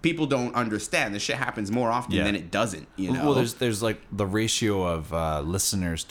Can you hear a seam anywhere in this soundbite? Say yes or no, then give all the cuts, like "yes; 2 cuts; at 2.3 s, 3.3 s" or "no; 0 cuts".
no; 0 cuts